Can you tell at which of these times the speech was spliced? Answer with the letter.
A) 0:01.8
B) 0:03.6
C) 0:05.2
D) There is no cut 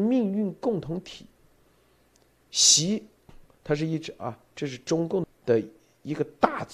C